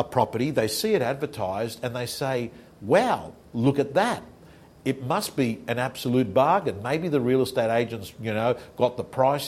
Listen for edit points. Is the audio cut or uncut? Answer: uncut